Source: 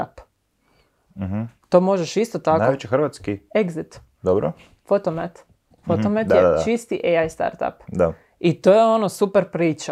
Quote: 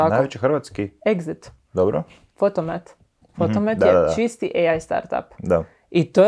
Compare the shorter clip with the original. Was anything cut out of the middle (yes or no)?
no